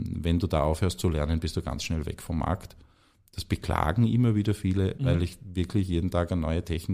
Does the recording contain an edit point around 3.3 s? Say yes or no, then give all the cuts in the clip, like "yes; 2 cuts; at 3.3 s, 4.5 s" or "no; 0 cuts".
no; 1 cut; at 5.0 s